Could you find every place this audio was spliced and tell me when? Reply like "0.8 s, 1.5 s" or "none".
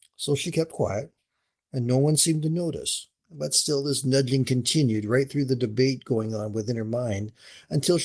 3.2 s

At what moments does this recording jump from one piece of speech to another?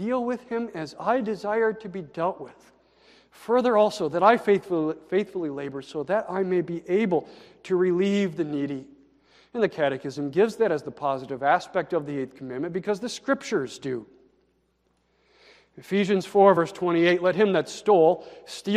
none

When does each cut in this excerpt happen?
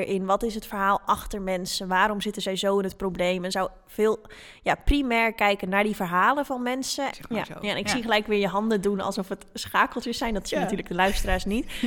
7.1 s

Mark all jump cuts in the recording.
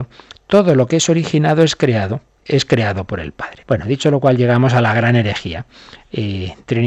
2.4 s, 3.6 s

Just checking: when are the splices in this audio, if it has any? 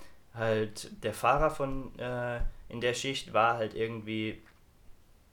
none

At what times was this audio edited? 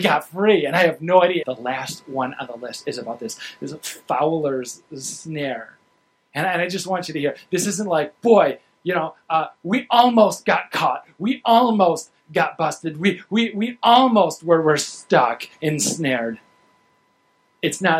1.4 s

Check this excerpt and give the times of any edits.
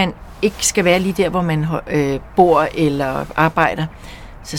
none

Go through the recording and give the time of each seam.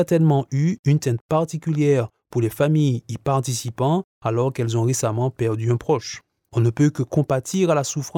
none

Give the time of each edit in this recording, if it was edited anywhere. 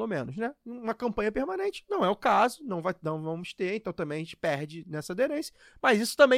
none

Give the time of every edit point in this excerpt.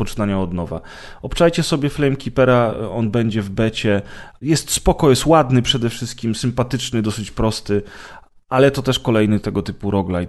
4.4 s

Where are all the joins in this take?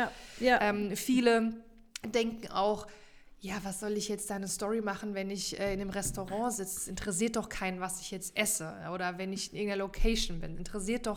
none

